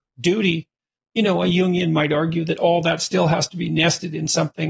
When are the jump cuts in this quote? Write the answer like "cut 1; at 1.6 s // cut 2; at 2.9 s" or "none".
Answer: cut 1; at 1.0 s